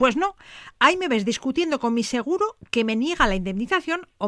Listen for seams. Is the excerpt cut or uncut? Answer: uncut